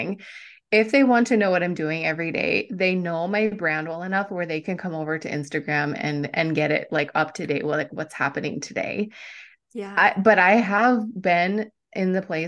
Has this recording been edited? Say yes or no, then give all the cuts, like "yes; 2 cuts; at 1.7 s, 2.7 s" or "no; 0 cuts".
no; 0 cuts